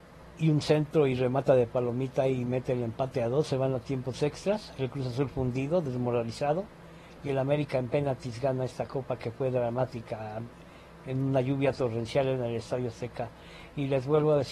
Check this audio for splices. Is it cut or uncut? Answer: uncut